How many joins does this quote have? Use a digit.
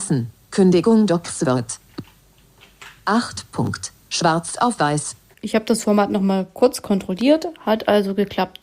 1